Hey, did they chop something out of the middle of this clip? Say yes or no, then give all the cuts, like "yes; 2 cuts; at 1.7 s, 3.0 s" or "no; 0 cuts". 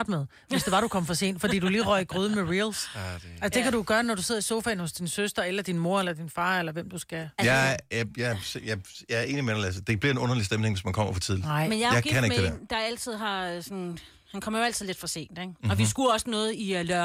no; 0 cuts